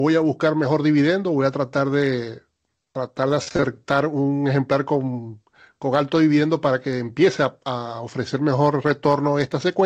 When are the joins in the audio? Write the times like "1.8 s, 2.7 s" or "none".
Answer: none

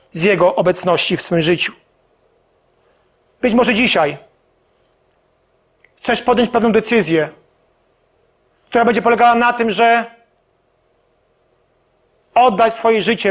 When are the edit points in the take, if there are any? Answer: none

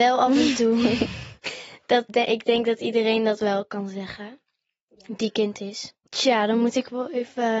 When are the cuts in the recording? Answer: 2.1 s, 6.1 s

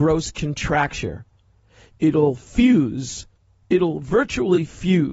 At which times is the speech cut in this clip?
none

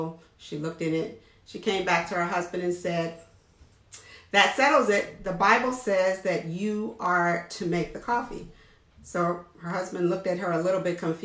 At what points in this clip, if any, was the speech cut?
none

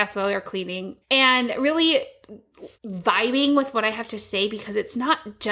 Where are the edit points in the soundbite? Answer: 1.0 s, 2.7 s

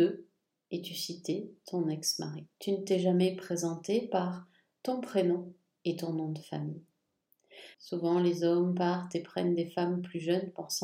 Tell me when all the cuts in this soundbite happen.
7.7 s

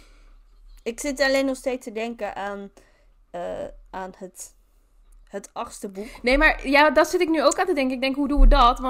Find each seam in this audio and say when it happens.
none

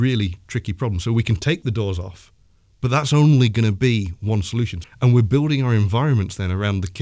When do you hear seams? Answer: 4.8 s

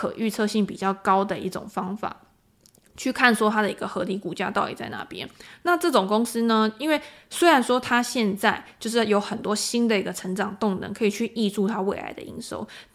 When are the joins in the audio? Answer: none

